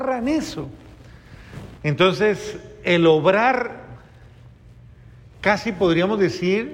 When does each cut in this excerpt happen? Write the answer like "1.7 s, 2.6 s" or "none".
1.8 s